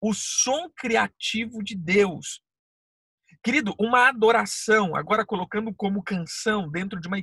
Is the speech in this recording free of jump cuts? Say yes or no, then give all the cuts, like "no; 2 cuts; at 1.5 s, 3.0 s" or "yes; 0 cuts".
yes; 0 cuts